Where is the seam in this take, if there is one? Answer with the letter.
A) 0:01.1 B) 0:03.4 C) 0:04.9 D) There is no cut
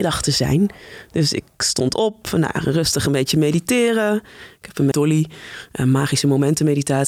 C